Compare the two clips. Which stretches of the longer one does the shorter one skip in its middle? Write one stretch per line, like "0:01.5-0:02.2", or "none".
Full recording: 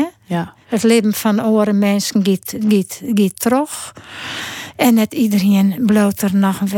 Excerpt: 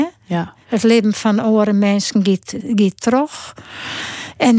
0:02.6-0:03.0